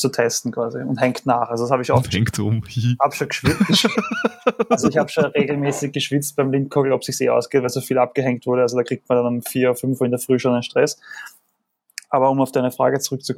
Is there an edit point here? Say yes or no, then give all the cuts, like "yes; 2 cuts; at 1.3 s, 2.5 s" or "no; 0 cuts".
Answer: no; 0 cuts